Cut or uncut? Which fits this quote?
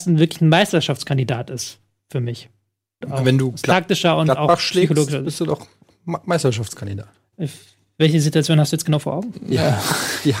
cut